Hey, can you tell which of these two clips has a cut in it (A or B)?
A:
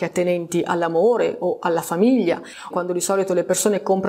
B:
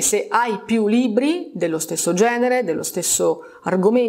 A